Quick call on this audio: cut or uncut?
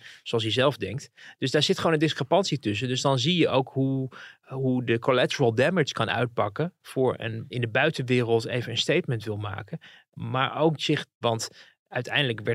cut